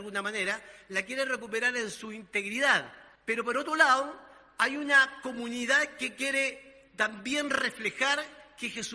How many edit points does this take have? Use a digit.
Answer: 1